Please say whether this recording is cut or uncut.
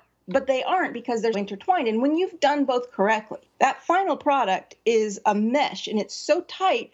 cut